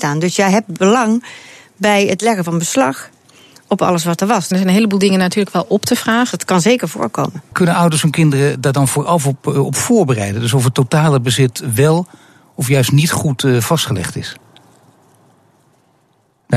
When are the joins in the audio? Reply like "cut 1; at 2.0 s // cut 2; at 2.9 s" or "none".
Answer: cut 1; at 4.5 s // cut 2; at 6.3 s // cut 3; at 7.5 s